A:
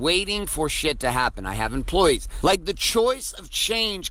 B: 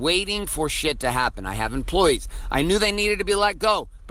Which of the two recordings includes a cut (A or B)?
A